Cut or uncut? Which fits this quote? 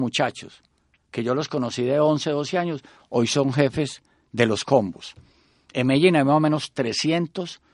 uncut